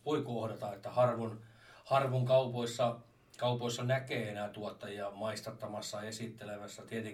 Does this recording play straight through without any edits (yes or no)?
yes